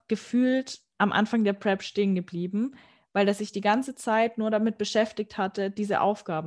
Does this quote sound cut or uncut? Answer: uncut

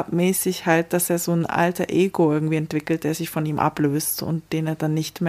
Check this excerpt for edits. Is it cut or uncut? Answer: uncut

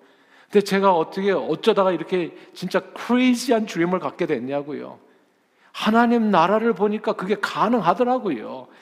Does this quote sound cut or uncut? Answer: uncut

